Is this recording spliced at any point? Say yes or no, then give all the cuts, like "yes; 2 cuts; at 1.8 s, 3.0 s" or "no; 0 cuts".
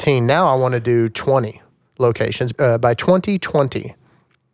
yes; 1 cut; at 2.5 s